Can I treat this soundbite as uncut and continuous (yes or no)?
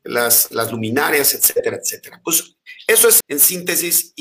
no